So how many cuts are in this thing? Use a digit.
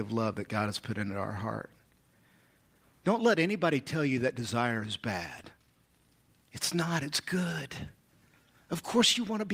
1